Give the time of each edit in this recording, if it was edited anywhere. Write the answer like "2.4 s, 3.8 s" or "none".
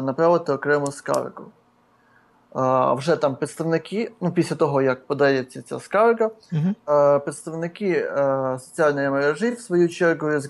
none